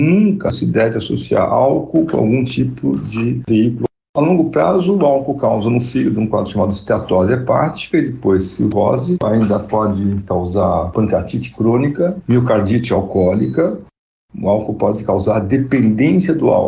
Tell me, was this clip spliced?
no; 0 cuts

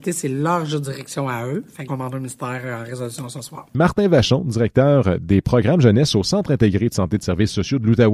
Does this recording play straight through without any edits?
no; 2 cuts; at 1.9 s, 3.7 s

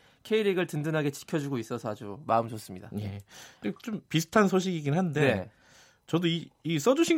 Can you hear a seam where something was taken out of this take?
no; 0 cuts

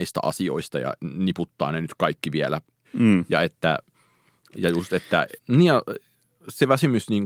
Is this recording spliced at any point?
yes; 2 cuts; at 2.8 s, 5.4 s

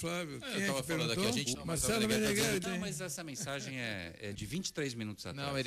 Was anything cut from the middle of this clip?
yes; 3 cuts; at 1.5 s, 2.6 s, 4.3 s

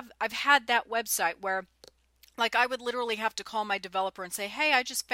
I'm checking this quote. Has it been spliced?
no; 0 cuts

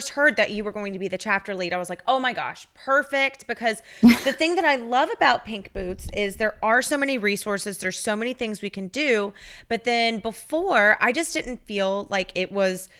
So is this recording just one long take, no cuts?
yes; 0 cuts

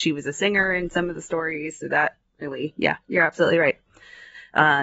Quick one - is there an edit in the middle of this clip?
no; 0 cuts

